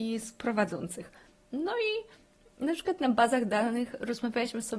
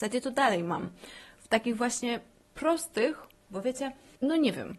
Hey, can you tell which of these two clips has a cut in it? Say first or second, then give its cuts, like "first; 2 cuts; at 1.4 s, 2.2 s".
second; 1 cut; at 3.5 s